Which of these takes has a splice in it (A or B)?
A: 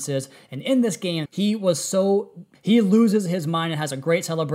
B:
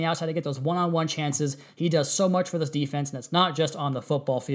A